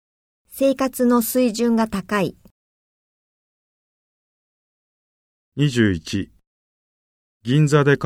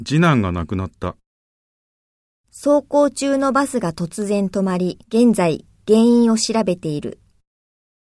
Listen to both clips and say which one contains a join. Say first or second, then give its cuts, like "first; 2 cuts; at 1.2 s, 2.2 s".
second; 2 cuts; at 2.4 s, 5.0 s